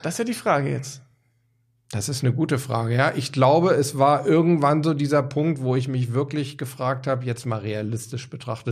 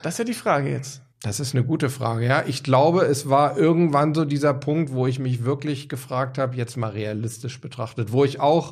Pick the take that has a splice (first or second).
second